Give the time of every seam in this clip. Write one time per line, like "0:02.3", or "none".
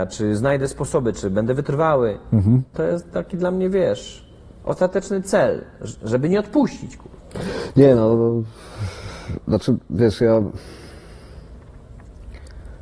0:02.7